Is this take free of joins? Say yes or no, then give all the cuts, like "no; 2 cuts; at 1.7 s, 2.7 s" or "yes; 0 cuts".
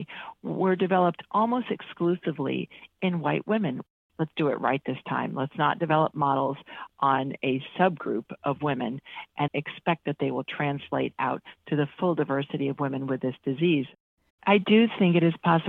no; 2 cuts; at 9.5 s, 14.3 s